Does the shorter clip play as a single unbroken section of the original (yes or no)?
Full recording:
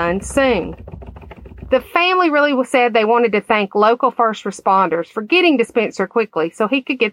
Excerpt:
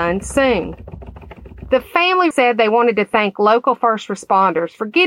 no